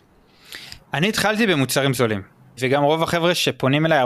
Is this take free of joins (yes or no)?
no